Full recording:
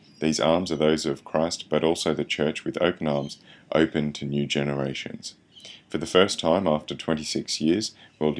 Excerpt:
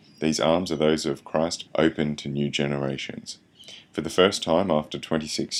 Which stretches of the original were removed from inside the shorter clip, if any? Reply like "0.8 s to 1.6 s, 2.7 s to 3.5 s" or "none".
1.7 s to 3.6 s

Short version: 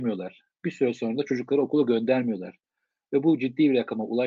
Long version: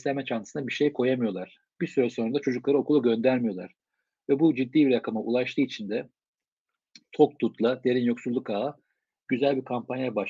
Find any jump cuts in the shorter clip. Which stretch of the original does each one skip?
none

